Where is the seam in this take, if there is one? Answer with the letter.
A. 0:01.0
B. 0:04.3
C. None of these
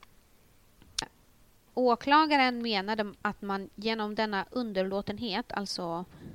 A